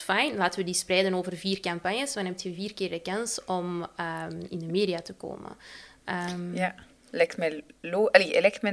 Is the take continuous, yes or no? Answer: yes